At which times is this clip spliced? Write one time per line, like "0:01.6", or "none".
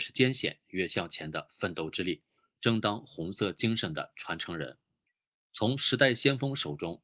none